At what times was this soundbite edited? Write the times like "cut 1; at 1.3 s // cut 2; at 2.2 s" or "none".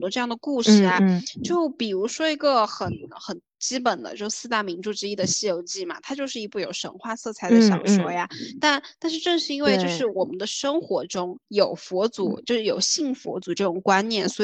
none